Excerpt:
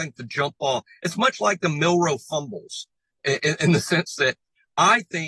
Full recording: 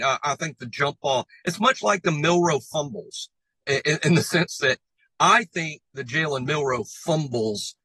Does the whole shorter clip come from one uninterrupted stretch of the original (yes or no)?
yes